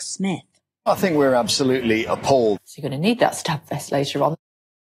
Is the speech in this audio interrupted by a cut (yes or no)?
yes